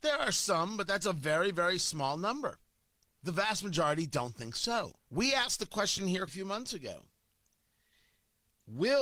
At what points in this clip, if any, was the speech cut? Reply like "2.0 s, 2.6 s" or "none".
5.0 s, 6.3 s